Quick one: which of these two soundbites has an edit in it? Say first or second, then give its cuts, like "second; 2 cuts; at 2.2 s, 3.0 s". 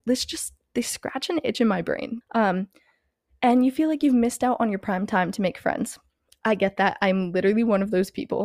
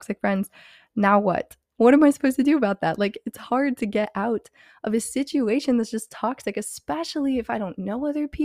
first; 1 cut; at 2.2 s